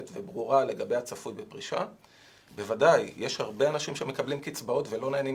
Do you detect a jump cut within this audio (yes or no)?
yes